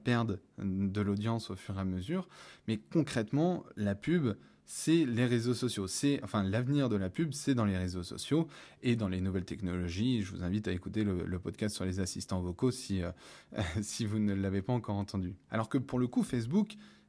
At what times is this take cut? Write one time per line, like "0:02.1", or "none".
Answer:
0:15.5